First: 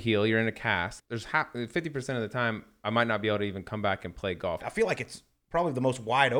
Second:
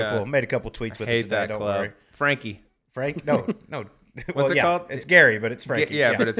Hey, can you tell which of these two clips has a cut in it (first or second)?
first